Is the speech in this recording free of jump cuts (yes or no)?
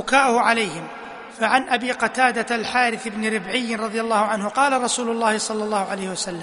no